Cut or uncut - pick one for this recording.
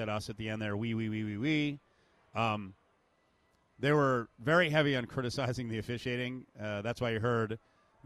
uncut